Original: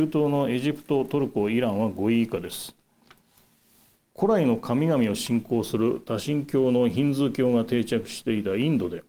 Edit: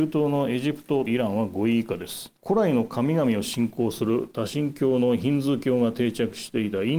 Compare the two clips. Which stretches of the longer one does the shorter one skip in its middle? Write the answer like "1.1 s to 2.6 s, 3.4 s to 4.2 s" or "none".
1.1 s to 1.5 s, 2.8 s to 4.1 s